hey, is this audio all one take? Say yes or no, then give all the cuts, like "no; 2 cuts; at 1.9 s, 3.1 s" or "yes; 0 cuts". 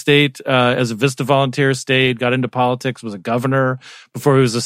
yes; 0 cuts